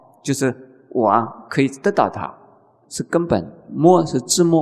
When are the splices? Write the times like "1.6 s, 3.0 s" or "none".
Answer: 2.8 s